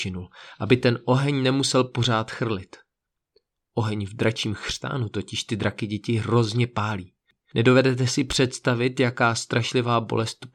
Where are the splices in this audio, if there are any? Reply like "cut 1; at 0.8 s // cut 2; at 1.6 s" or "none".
none